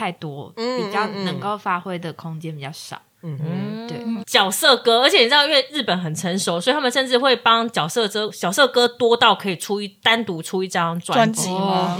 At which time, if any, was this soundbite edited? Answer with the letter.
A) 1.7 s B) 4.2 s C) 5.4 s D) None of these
B